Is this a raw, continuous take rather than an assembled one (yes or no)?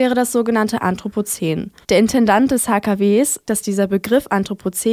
no